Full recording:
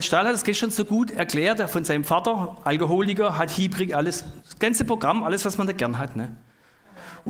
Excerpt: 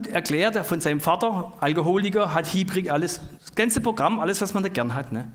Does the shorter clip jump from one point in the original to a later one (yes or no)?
no